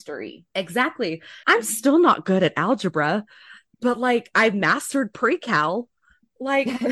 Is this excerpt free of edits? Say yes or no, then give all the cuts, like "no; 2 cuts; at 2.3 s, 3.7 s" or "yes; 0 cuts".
no; 1 cut; at 1.4 s